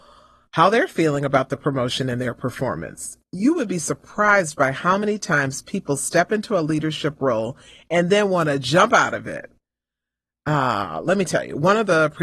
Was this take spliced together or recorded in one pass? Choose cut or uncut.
uncut